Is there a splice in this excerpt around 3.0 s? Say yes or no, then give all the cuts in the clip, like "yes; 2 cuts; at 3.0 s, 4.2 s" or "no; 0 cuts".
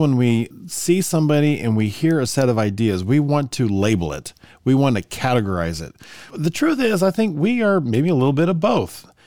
no; 1 cut; at 6.3 s